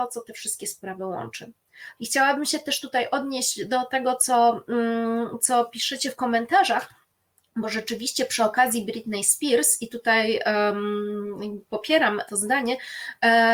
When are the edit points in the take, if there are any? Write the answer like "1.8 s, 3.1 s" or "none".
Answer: 2.0 s, 12.3 s